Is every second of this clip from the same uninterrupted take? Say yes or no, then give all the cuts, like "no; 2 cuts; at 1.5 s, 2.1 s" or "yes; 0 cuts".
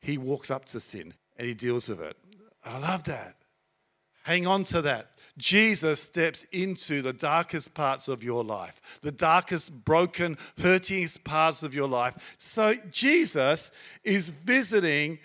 no; 3 cuts; at 1.2 s, 4.1 s, 12.4 s